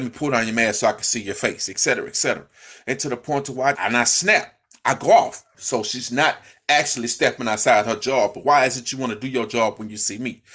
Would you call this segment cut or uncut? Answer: cut